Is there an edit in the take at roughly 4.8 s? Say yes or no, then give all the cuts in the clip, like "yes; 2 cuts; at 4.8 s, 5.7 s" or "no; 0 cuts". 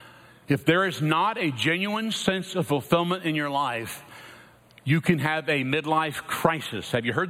no; 0 cuts